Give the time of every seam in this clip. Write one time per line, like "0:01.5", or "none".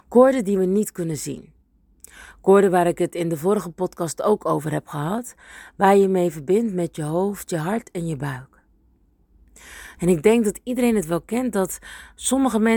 0:10.0